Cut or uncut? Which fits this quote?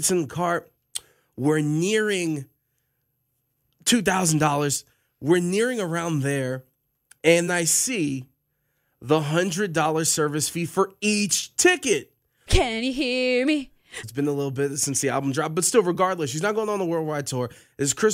cut